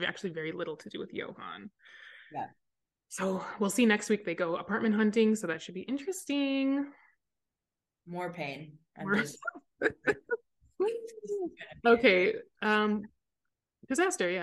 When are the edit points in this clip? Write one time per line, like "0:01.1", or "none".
none